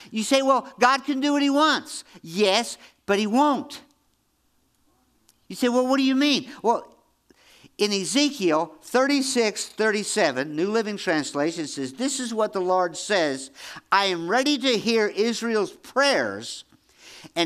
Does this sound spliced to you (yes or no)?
no